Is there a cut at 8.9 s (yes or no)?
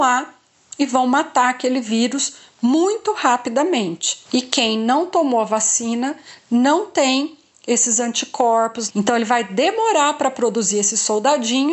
yes